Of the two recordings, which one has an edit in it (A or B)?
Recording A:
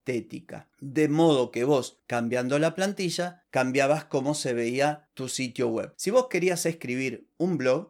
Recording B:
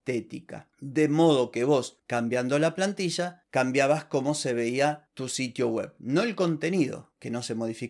A